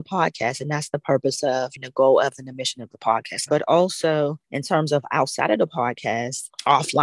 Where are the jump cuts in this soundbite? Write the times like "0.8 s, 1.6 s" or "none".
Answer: 3.5 s